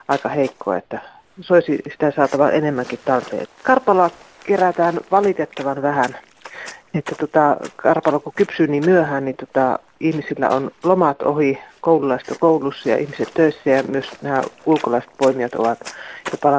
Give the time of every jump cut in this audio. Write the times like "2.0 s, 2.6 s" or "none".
3.4 s